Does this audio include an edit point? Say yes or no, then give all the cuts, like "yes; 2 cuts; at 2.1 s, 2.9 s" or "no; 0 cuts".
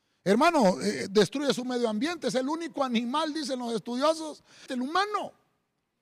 yes; 1 cut; at 4.7 s